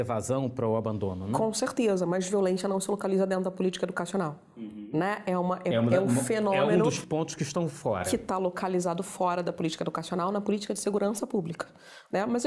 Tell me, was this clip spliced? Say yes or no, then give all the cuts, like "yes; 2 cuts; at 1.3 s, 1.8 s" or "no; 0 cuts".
yes; 1 cut; at 5.7 s